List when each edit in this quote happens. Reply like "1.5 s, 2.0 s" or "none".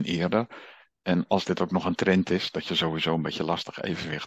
none